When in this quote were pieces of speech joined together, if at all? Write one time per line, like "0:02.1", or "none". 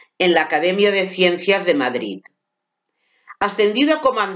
none